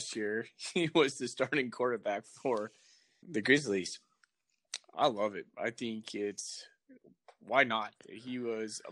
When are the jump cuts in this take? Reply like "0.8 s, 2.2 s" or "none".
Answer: 3.2 s, 4.9 s